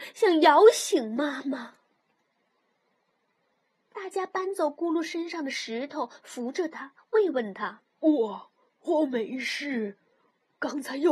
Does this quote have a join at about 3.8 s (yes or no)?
yes